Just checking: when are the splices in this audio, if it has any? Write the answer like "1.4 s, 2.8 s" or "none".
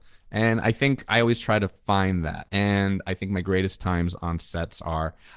2.5 s